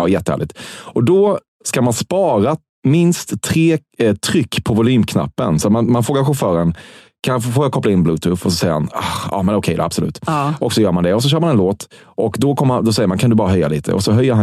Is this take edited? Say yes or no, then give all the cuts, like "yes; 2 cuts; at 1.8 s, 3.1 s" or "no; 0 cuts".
no; 0 cuts